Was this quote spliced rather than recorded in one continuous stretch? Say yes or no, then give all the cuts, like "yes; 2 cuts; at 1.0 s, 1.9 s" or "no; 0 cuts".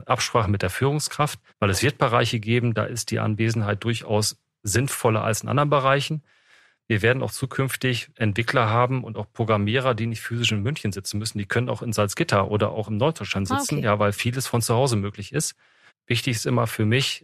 yes; 2 cuts; at 1.5 s, 15.9 s